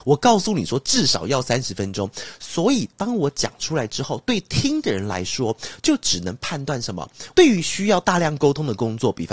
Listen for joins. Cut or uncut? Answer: cut